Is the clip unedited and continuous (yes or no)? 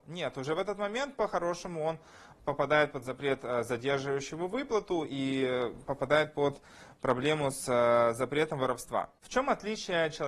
yes